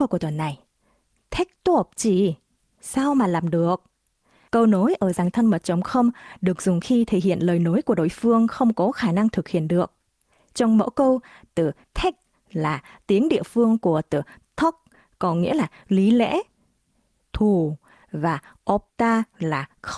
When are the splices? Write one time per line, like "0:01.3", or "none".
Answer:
0:17.9